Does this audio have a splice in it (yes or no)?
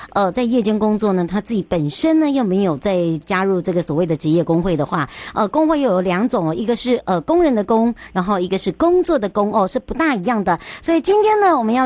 yes